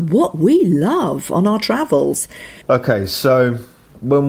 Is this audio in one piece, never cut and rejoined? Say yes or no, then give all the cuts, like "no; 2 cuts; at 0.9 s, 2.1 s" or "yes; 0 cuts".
no; 1 cut; at 2.6 s